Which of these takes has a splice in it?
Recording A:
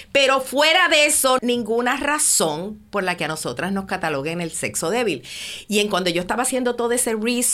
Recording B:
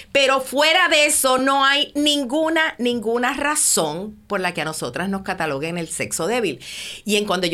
A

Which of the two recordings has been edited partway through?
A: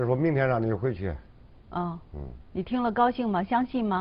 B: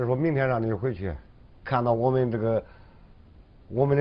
B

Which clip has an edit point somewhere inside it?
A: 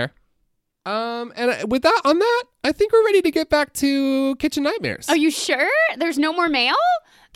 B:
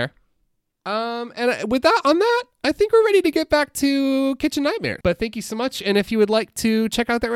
B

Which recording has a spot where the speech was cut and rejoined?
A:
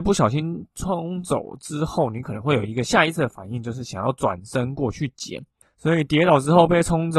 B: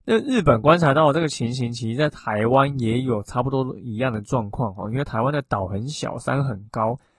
A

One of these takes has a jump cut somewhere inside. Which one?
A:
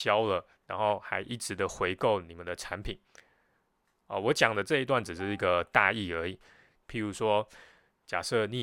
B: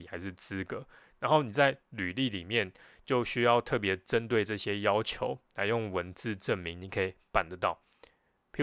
A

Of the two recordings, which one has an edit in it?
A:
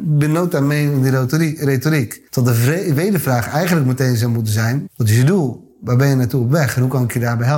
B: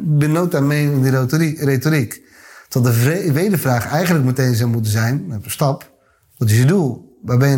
A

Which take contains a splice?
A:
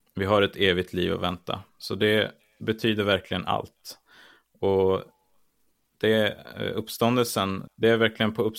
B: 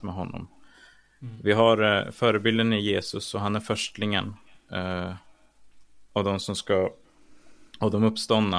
A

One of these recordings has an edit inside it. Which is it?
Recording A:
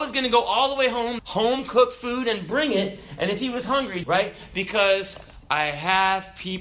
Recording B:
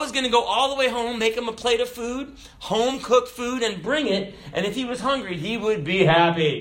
A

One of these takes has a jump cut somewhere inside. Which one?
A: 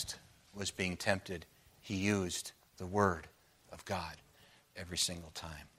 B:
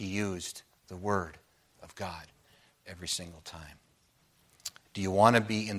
B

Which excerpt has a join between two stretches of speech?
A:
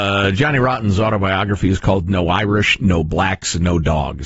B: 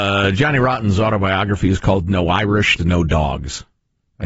B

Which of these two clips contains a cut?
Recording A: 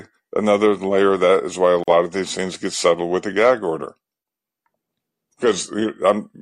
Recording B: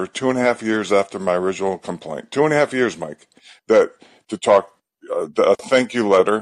B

